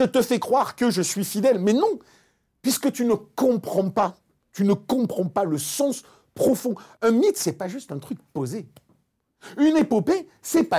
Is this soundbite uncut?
yes; 0 cuts

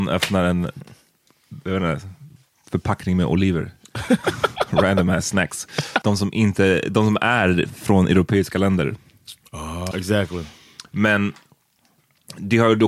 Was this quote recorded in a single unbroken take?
no; 2 cuts; at 6.0 s, 9.9 s

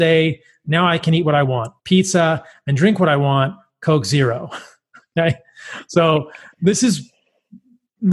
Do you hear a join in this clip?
yes; 1 cut; at 1.8 s

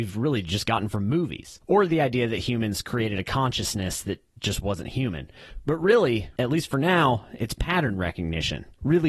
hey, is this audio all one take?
yes; 0 cuts

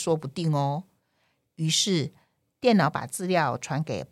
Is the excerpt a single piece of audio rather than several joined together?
yes; 0 cuts

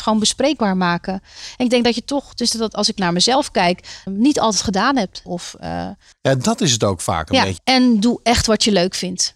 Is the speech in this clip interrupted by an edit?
yes; 3 cuts; at 4.1 s, 5.2 s, 7.6 s

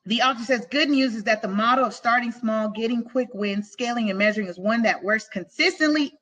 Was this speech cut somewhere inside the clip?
no; 0 cuts

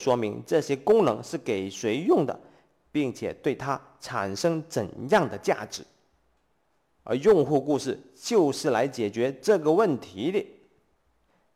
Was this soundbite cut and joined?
no; 0 cuts

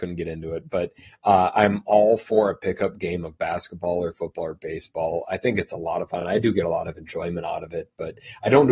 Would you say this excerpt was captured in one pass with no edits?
yes; 0 cuts

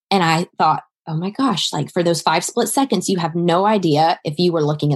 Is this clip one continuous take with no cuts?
yes; 0 cuts

